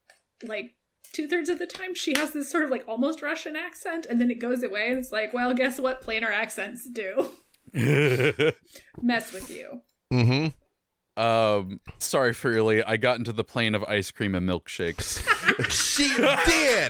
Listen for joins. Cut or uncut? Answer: cut